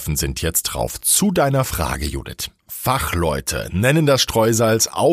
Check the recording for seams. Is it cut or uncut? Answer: uncut